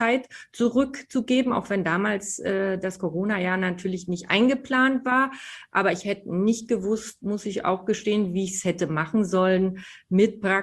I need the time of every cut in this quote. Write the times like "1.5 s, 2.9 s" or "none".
none